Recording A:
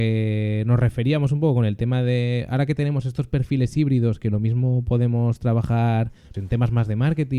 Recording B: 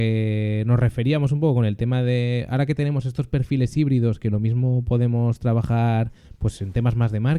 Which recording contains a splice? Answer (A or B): A